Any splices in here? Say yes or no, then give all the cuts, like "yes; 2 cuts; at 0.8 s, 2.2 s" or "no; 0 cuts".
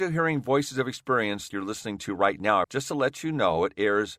yes; 2 cuts; at 1.5 s, 2.6 s